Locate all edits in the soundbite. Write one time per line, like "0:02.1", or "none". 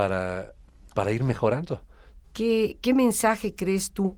0:02.2

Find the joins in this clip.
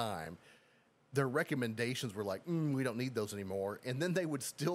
none

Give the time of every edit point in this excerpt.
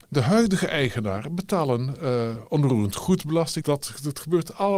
0:03.6

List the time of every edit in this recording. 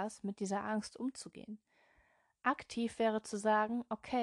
none

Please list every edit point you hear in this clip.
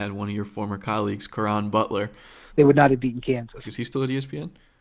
0:02.5
0:03.6

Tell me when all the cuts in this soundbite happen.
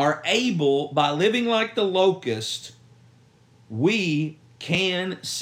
none

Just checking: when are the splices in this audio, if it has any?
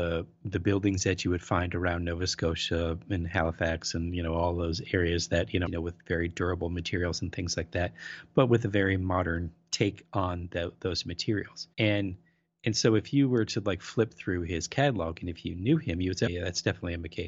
0:05.7
0:11.7
0:16.3

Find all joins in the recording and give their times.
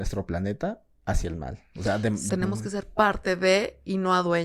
0:02.3

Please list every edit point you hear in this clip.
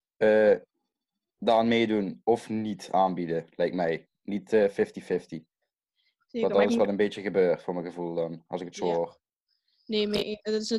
none

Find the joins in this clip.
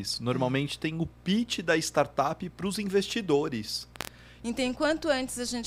0:04.4

